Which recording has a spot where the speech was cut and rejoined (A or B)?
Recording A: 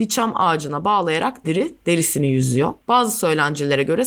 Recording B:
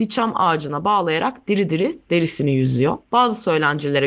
A